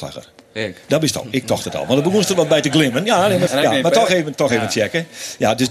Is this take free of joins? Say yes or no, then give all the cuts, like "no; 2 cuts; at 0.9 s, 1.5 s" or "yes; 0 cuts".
no; 1 cut; at 3.5 s